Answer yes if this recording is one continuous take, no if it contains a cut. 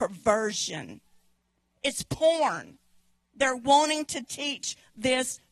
yes